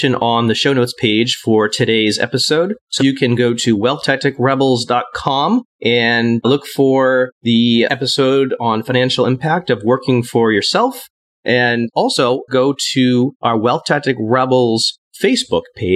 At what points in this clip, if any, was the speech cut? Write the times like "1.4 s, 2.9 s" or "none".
3.0 s, 11.3 s, 12.5 s